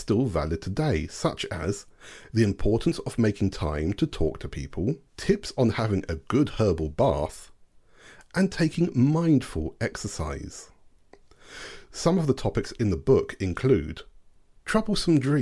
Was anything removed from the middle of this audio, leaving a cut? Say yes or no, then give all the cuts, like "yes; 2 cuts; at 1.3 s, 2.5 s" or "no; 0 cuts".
yes; 1 cut; at 5.1 s